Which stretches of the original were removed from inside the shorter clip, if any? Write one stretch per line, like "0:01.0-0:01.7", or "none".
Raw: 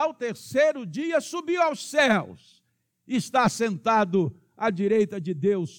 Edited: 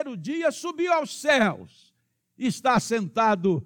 none